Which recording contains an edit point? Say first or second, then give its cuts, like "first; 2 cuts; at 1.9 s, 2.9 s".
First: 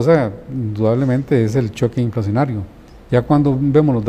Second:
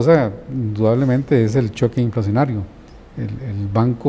first; 1 cut; at 3.1 s